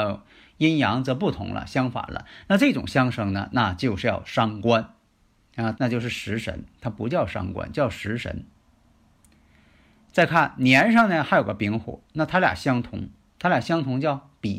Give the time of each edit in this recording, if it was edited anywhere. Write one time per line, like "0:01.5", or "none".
0:05.7